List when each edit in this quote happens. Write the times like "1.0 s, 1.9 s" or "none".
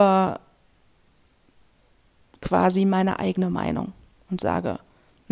none